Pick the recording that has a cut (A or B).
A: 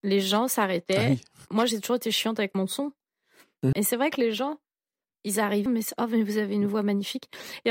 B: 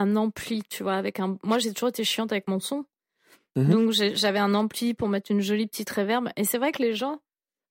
A